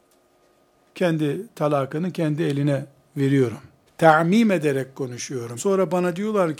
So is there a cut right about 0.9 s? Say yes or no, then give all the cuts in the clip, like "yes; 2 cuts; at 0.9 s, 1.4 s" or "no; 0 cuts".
no; 2 cuts; at 3.9 s, 5.6 s